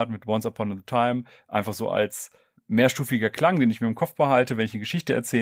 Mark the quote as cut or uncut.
uncut